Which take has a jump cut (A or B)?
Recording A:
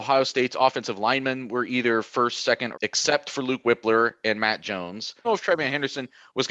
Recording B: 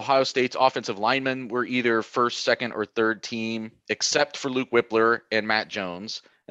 A